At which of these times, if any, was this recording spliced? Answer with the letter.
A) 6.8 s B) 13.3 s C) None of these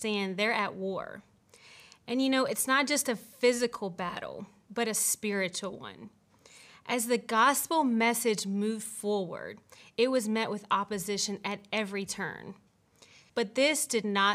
B